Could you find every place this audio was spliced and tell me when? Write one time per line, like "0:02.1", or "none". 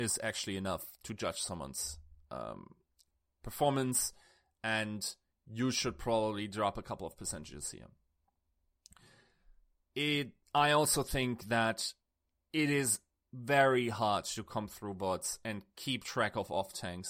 none